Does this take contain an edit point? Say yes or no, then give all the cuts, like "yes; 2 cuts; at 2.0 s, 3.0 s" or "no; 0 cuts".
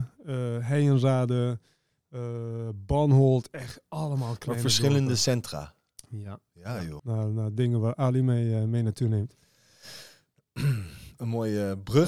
yes; 1 cut; at 7.0 s